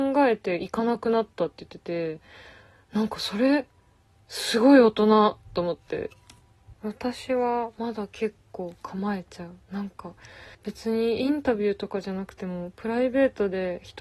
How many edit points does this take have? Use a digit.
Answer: 2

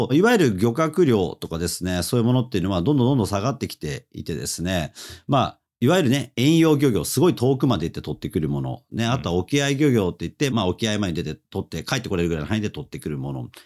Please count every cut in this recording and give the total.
1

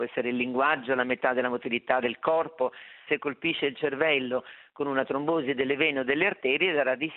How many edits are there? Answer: 1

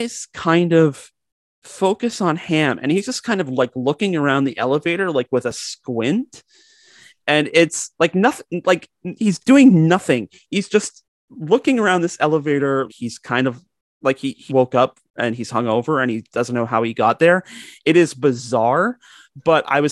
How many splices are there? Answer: 2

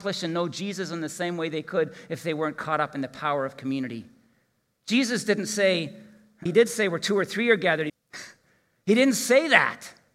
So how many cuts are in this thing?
2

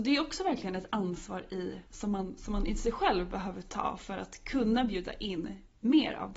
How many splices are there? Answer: 1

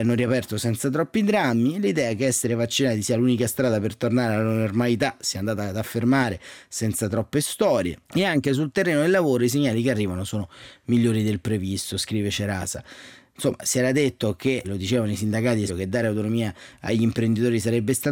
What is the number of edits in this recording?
3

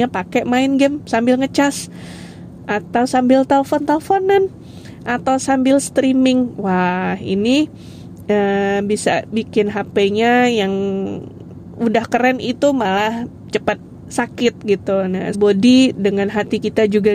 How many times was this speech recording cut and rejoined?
1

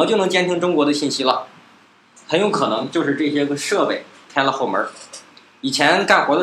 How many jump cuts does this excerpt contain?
0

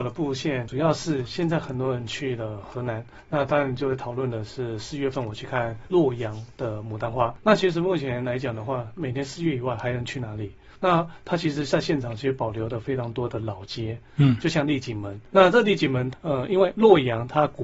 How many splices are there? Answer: 2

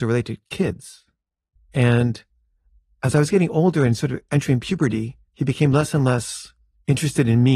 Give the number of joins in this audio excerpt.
2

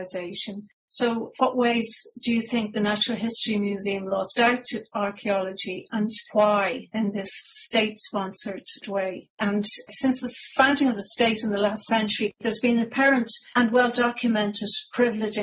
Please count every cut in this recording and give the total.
1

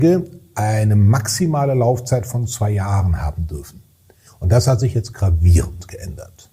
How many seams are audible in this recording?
1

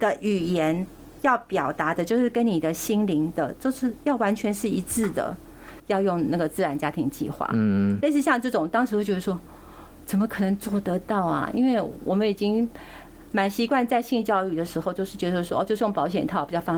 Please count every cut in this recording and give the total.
1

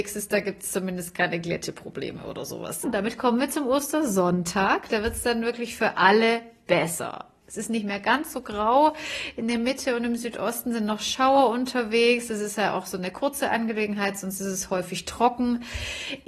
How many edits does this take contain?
1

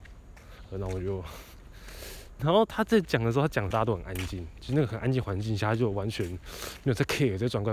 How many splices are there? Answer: 2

